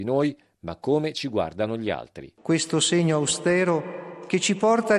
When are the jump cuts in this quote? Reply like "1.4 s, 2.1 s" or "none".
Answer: none